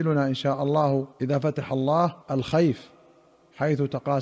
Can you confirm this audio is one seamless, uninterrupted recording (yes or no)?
no